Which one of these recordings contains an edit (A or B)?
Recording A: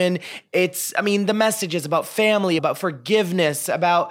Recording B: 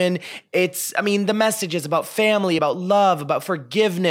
A